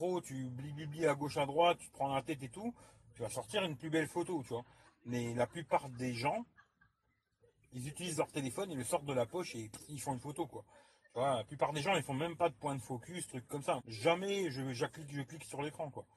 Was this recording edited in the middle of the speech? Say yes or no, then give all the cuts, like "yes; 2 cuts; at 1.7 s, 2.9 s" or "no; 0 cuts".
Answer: yes; 1 cut; at 13.8 s